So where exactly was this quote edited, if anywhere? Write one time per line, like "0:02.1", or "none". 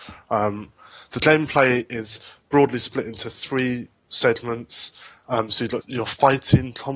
0:05.8